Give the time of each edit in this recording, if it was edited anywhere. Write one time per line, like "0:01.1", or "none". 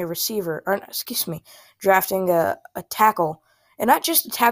none